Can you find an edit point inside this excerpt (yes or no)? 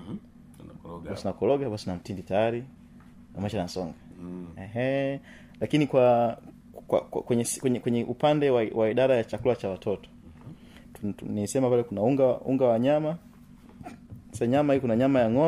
no